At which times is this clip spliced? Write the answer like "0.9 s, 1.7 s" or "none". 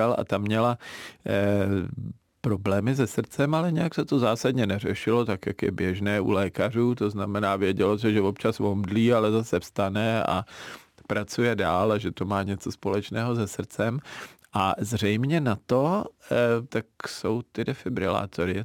14.4 s, 16.7 s